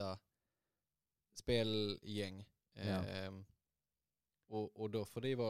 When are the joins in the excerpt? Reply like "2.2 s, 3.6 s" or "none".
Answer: none